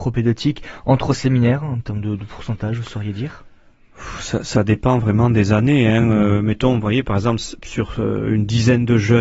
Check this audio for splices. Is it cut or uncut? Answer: uncut